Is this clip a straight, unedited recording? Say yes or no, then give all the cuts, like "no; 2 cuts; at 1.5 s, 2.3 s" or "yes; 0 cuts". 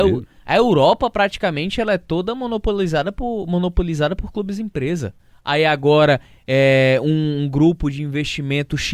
no; 1 cut; at 5.3 s